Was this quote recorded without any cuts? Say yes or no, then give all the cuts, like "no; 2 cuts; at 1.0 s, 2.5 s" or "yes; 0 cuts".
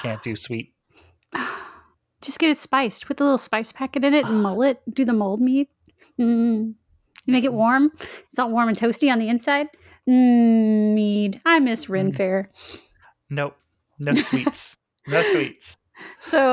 yes; 0 cuts